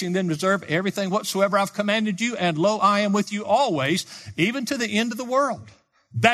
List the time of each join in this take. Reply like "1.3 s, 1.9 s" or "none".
none